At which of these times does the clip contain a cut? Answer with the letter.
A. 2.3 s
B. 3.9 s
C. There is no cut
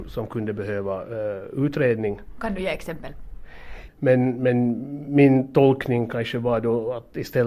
B